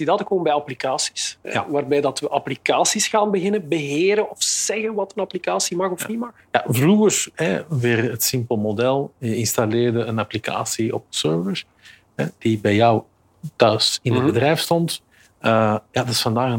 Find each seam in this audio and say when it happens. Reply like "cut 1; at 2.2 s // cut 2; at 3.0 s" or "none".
none

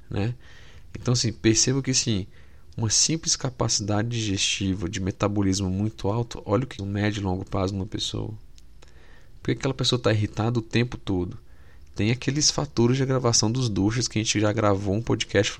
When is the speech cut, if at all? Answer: cut 1; at 6.8 s

